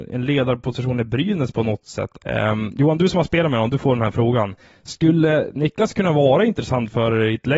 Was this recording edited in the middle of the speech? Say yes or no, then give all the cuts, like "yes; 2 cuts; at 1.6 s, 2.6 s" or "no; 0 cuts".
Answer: yes; 1 cut; at 2.2 s